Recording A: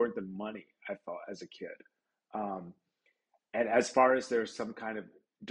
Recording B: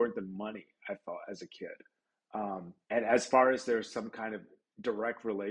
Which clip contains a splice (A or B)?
B